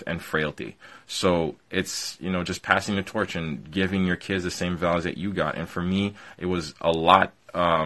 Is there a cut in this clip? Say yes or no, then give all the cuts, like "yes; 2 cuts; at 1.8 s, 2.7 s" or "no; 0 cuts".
no; 0 cuts